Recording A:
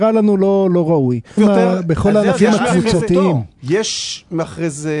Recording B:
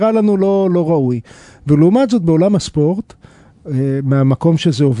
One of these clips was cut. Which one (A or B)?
A